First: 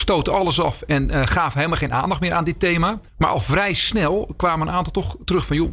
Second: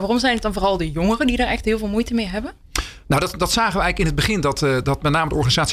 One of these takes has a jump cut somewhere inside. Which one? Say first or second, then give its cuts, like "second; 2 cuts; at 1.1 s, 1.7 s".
first; 1 cut; at 3.1 s